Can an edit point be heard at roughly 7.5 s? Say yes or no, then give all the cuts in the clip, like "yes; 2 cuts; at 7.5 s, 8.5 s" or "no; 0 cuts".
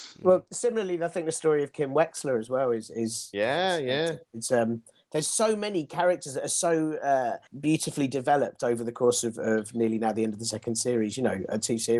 yes; 1 cut; at 7.5 s